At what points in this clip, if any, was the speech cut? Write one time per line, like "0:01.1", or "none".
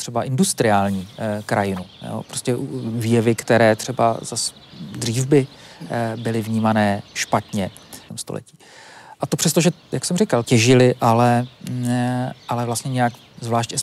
0:08.1
0:09.2
0:10.4